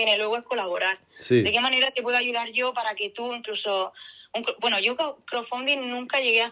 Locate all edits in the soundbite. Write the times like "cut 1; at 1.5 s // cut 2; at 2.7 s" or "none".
none